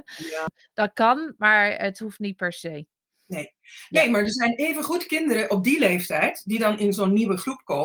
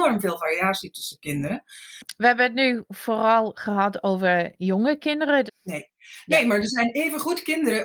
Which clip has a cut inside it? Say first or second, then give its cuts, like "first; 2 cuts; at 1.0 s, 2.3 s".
second; 1 cut; at 5.5 s